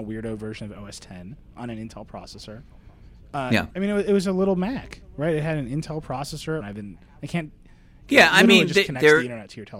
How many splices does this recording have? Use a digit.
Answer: 3